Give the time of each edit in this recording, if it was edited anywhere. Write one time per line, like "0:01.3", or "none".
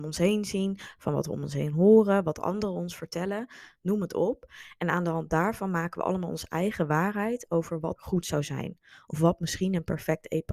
0:08.0